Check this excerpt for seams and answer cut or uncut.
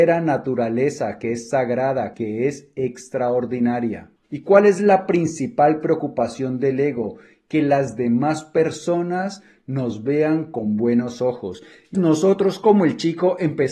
cut